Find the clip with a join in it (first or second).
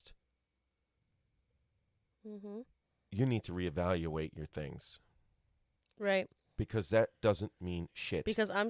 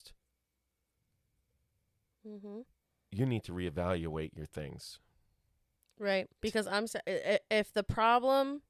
second